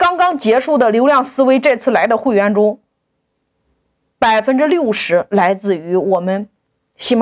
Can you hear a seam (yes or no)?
no